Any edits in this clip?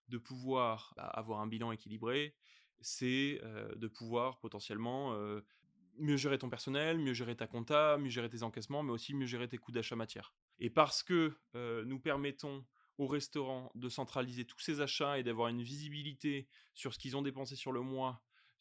no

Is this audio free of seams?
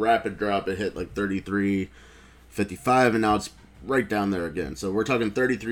yes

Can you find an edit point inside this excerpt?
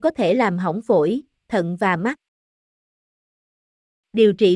no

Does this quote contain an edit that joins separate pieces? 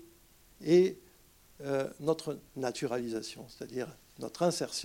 no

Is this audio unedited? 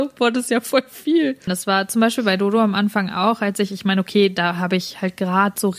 no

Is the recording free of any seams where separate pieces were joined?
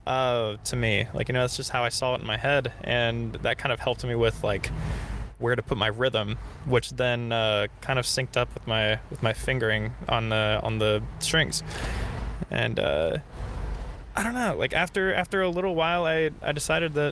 yes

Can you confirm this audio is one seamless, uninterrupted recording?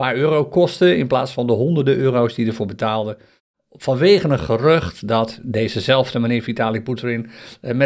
yes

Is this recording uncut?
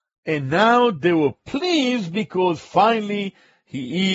yes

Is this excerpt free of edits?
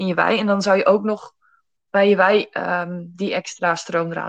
yes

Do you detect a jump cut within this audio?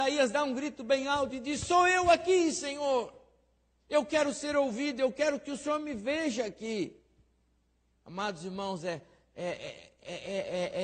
no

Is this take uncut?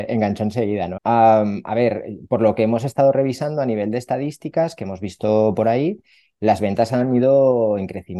no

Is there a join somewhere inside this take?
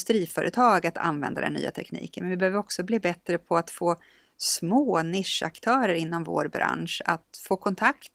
no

